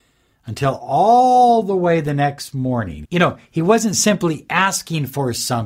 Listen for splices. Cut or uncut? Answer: cut